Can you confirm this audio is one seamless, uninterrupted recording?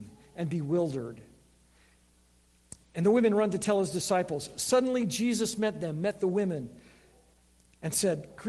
yes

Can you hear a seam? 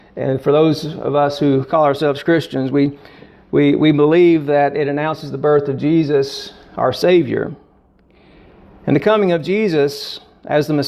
no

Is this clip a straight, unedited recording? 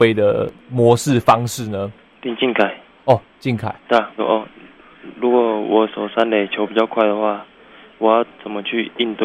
no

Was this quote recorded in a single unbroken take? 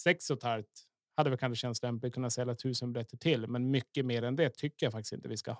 yes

